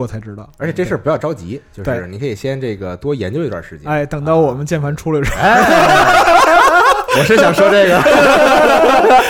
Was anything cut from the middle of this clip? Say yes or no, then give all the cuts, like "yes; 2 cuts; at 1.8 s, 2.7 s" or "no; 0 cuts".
no; 0 cuts